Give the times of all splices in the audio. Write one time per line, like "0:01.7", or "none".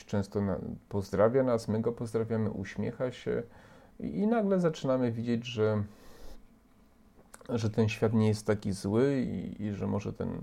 none